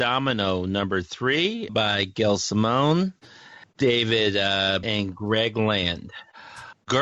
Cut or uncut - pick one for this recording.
cut